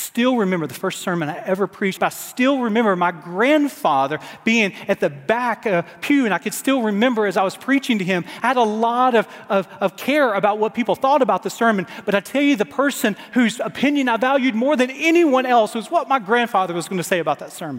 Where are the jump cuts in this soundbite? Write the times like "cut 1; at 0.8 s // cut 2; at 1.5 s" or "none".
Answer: cut 1; at 2.0 s

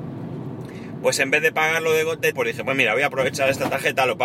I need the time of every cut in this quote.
cut 1; at 2.3 s

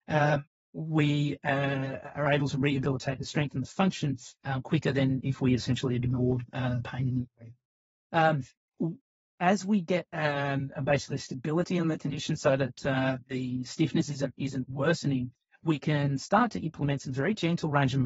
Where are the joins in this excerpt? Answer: none

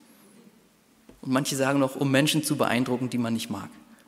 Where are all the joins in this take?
cut 1; at 1.2 s

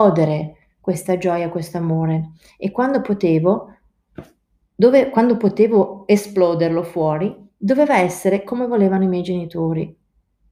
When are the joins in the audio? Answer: none

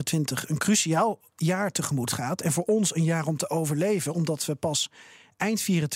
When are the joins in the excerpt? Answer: none

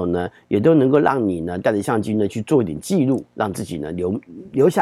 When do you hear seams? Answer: none

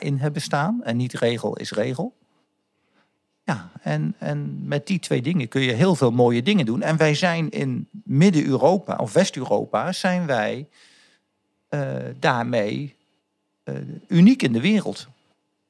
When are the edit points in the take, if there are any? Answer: none

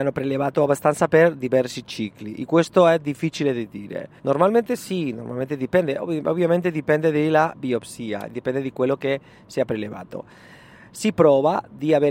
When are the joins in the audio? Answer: cut 1; at 4.2 s

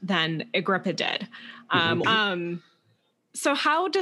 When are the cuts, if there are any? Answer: cut 1; at 2.0 s

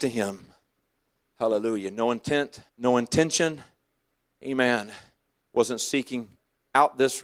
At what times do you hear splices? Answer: cut 1; at 2.7 s

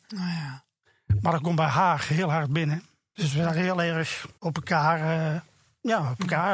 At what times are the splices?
cut 1; at 3.2 s // cut 2; at 4.4 s

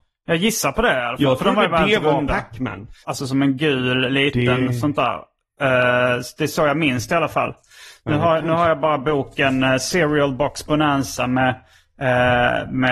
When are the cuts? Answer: cut 1; at 3.0 s

